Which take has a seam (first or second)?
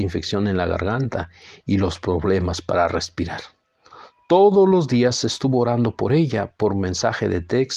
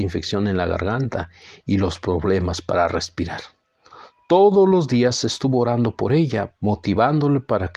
second